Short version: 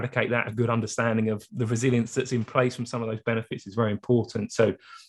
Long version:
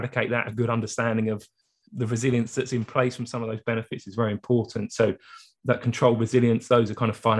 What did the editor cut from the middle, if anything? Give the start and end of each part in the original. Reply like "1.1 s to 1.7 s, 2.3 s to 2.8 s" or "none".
1.5 s to 1.9 s